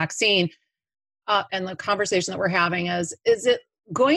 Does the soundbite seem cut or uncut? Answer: cut